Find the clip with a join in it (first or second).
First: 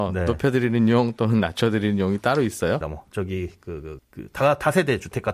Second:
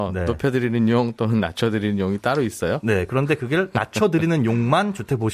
first